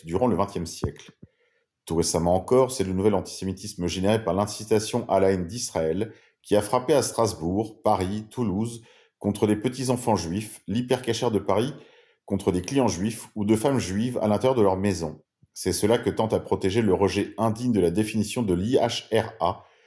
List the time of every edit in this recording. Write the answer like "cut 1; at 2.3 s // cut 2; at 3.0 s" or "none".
none